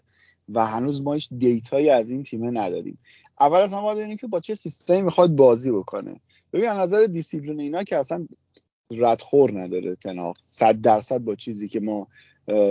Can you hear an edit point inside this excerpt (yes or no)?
no